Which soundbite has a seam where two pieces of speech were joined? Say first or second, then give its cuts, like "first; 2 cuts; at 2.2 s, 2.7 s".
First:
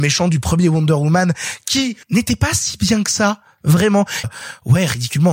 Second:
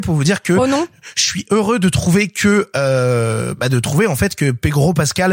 first; 2 cuts; at 2.0 s, 4.2 s